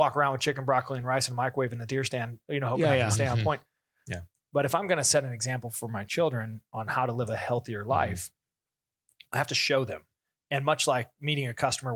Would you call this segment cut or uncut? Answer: uncut